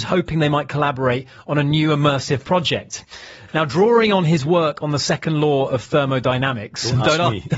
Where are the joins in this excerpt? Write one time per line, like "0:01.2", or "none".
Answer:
none